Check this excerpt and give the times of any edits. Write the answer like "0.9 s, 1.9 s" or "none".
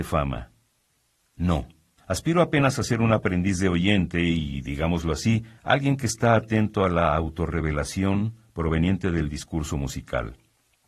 2.0 s, 5.6 s